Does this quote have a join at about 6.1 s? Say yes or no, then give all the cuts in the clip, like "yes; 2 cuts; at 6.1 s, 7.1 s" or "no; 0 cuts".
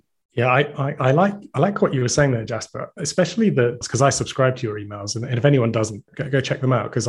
yes; 2 cuts; at 3.8 s, 6.1 s